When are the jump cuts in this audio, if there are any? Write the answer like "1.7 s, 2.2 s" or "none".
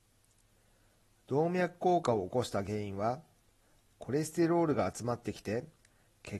none